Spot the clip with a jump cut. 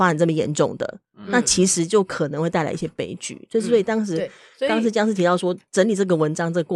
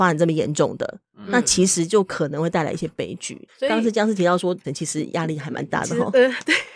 second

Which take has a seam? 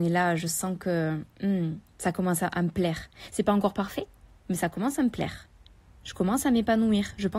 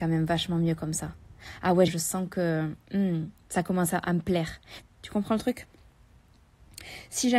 second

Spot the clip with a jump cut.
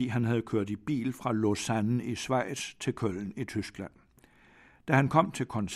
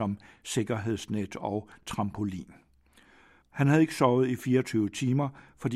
second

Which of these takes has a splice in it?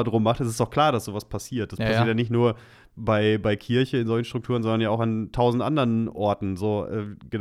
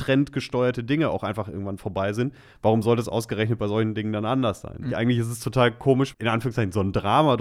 second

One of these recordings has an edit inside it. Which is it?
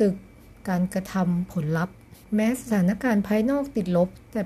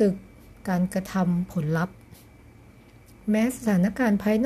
first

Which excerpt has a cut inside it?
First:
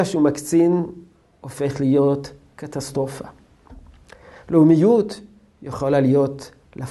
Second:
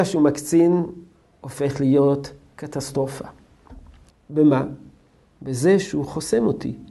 second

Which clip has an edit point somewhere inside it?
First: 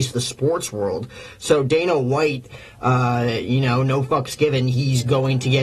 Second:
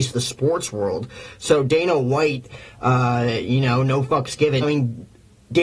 second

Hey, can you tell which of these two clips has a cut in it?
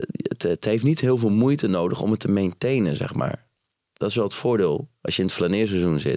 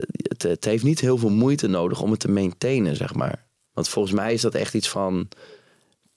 second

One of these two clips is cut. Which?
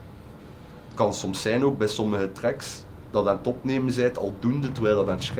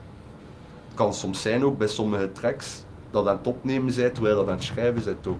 second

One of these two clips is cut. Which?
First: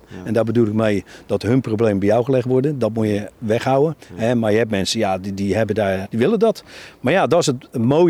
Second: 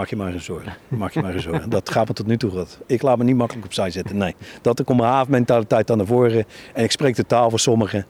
first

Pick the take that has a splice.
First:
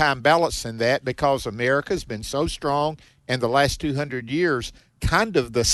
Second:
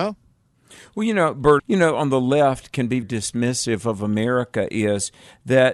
second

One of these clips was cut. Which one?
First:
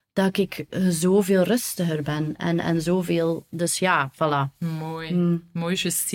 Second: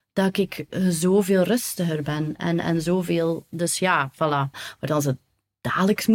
second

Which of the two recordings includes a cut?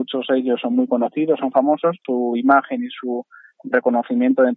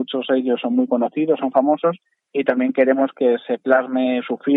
first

